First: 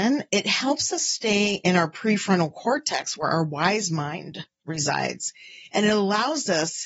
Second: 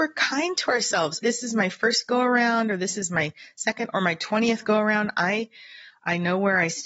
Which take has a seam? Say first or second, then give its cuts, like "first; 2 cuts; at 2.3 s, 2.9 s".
second; 1 cut; at 1.2 s